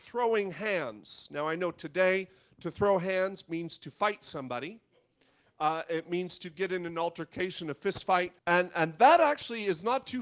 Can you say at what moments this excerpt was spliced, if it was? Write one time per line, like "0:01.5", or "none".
0:08.4